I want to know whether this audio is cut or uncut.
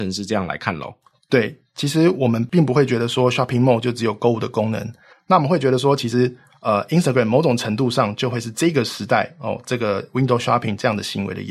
cut